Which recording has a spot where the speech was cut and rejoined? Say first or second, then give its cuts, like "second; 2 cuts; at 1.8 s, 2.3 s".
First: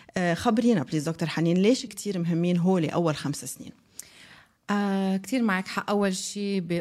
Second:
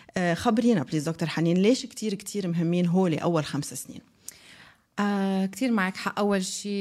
first; 1 cut; at 1.9 s